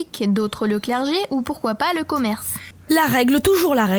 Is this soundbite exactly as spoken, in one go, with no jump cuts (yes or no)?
no